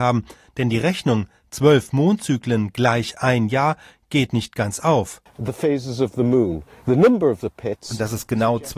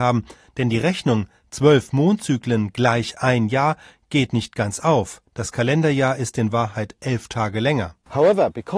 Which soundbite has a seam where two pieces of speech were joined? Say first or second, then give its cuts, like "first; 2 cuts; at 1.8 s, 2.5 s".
first; 1 cut; at 5.3 s